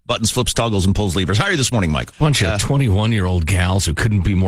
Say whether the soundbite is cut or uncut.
cut